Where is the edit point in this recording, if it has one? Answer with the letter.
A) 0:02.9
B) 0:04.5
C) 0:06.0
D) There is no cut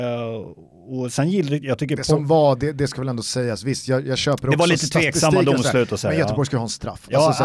D